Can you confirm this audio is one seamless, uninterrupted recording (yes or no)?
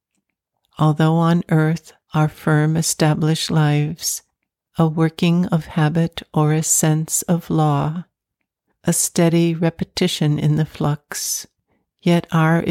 yes